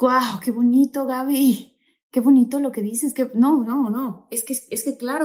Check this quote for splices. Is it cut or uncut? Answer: uncut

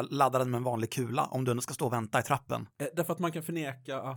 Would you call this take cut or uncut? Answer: uncut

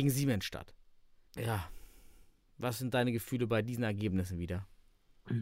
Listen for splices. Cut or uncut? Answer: cut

